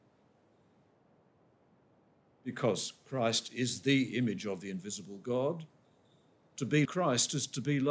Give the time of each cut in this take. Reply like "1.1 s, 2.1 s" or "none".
6.9 s